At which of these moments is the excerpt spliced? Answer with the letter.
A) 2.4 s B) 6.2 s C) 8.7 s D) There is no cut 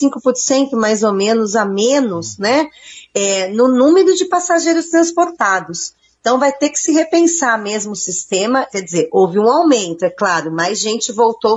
C